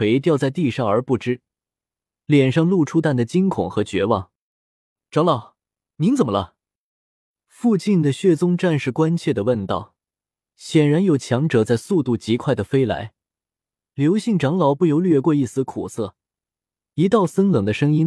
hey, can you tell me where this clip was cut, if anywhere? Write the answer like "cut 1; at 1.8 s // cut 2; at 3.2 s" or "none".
cut 1; at 3.0 s // cut 2; at 10.5 s // cut 3; at 16.8 s